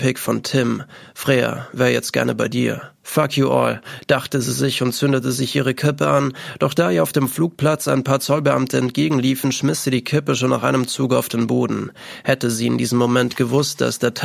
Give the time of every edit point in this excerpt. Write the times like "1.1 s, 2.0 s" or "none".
3.0 s

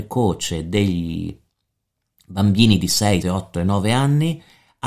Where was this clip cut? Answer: 3.2 s

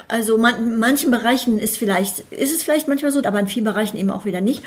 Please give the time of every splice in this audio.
3.2 s

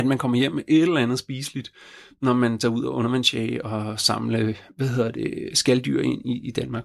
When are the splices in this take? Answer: none

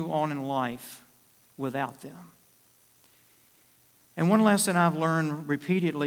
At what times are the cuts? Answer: none

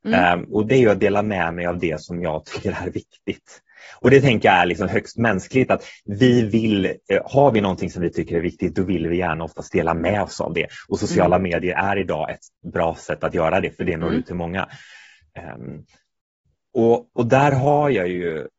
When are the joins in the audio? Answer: none

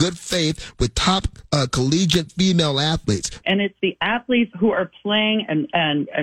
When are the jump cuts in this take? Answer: 3.4 s, 4.5 s

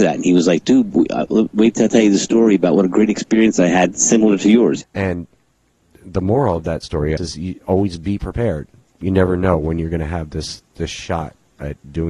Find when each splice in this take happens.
4.8 s, 7.2 s

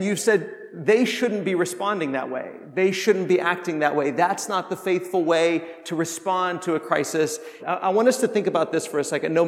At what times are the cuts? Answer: 7.6 s

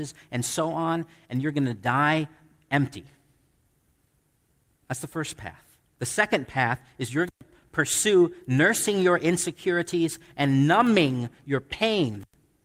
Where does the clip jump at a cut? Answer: 5.9 s

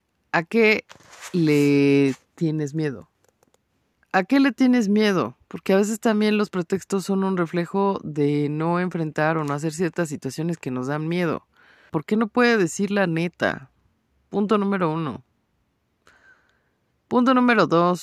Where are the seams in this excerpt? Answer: 3.9 s, 11.9 s

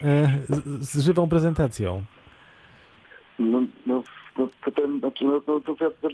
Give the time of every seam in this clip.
none

